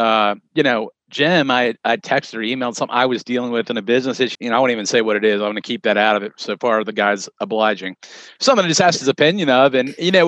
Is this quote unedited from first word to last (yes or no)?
no